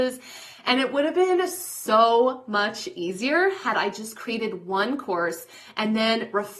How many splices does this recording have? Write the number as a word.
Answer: zero